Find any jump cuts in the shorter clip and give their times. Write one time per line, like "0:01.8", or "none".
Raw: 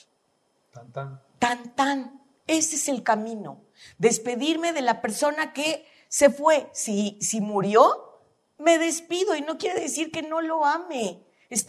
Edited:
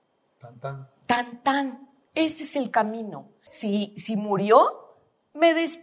0:03.5

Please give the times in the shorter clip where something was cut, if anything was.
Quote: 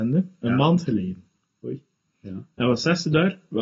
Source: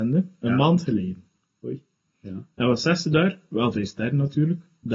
none

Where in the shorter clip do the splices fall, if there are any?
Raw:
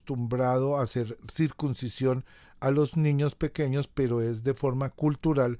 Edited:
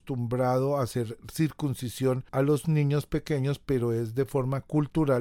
0:02.3

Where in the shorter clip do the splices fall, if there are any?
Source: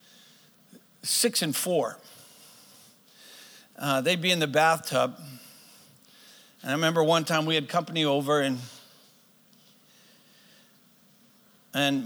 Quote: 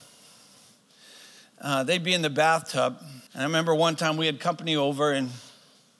0:03.3

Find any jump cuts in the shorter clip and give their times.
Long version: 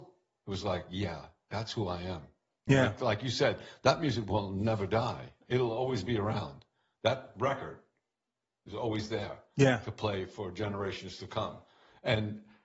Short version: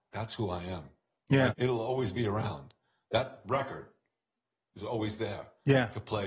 0:01.5

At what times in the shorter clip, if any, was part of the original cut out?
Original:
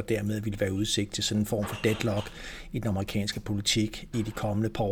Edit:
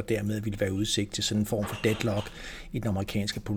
none

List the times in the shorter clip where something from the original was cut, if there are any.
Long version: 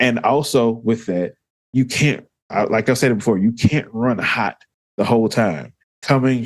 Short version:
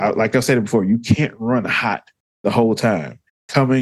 none

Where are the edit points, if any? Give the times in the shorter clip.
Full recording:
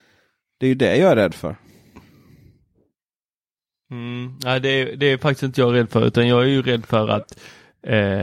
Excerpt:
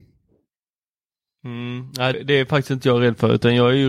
0:02.1

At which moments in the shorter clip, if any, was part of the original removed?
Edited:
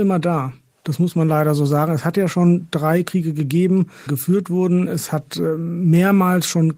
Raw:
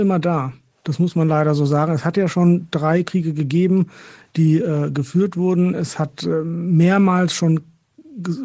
0:04.1

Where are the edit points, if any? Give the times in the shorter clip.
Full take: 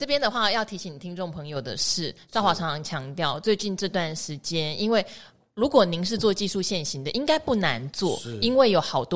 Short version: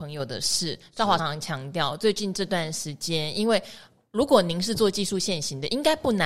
0:01.2

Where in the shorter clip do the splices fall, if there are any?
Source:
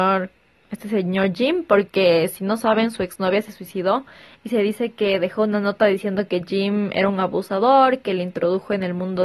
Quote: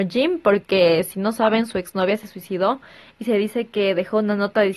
none

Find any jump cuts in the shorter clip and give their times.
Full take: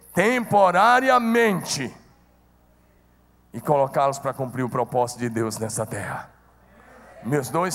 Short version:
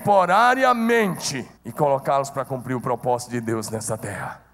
0:01.6

